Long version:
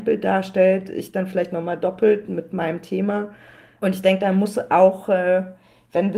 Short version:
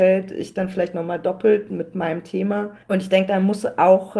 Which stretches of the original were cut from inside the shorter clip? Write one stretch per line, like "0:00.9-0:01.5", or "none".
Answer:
0:03.4-0:03.8